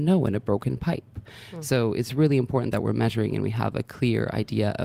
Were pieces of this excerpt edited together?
no; 0 cuts

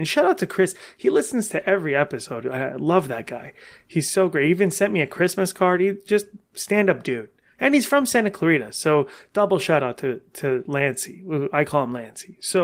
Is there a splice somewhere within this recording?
no; 0 cuts

